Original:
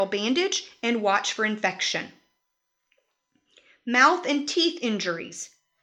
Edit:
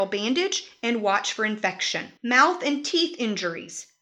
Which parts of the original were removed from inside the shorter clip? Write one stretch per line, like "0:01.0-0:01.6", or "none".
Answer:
0:02.2-0:03.8